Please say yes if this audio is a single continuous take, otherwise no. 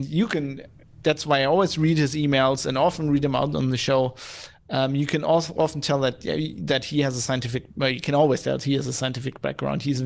yes